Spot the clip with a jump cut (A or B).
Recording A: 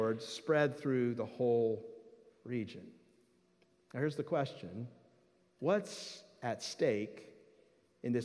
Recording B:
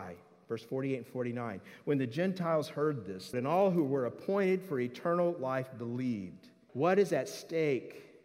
B